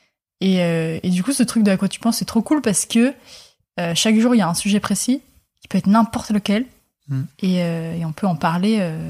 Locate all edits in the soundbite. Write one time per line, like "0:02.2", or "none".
none